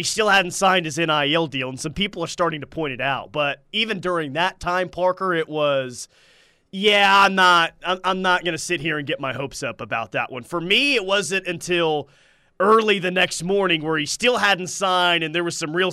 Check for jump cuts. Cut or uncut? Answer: uncut